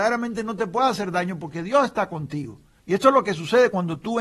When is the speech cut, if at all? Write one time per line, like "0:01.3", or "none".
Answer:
0:02.8

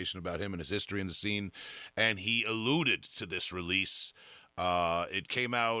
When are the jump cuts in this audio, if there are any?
none

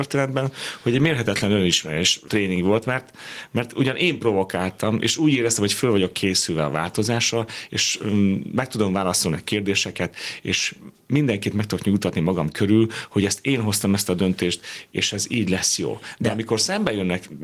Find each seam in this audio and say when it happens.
0:02.3

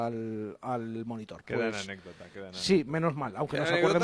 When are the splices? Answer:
0:01.4

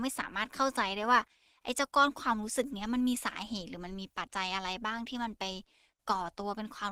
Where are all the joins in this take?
0:04.3

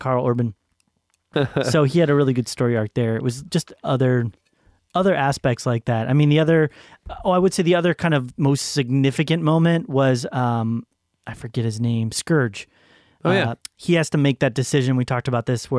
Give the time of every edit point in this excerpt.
0:01.3
0:13.6

